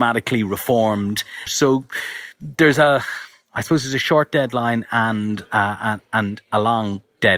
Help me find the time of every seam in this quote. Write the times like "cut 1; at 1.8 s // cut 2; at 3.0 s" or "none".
cut 1; at 1.5 s

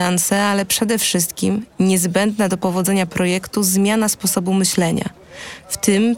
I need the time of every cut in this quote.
none

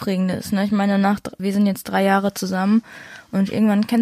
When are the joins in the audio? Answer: cut 1; at 1.4 s

